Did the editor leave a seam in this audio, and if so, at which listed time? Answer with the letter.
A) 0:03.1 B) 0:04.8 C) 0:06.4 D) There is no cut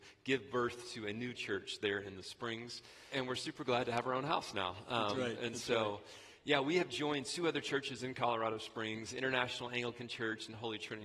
A